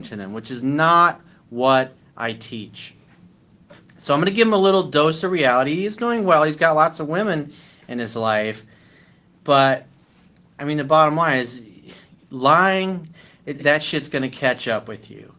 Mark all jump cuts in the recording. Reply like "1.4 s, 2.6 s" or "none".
13.6 s